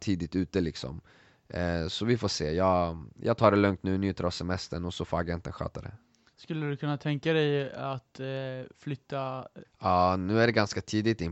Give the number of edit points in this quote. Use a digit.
1